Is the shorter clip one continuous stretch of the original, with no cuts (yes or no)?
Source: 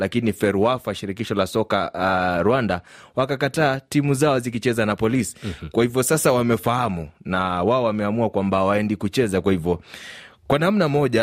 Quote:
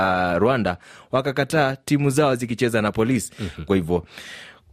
no